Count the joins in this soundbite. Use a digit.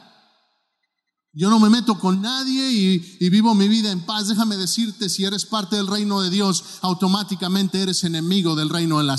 0